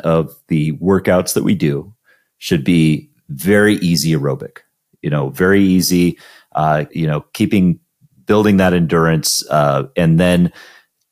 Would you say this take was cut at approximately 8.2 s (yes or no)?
no